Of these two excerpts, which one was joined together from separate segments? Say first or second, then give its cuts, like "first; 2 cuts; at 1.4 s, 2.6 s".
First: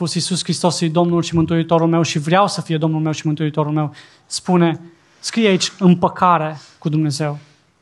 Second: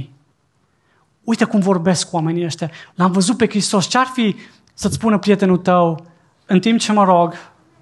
second; 2 cuts; at 2.9 s, 6.3 s